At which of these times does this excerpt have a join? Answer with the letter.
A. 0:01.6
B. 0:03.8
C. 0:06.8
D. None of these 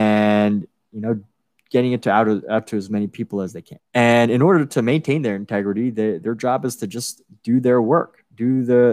B